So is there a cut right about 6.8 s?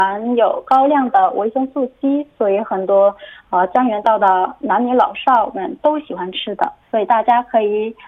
yes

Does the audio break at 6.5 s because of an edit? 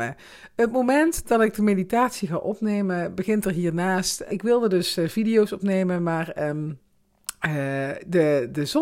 no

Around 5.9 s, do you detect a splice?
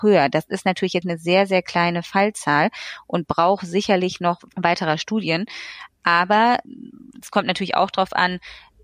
no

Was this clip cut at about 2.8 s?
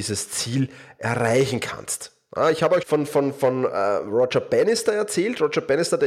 yes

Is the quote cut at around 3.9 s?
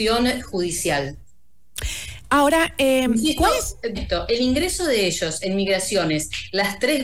yes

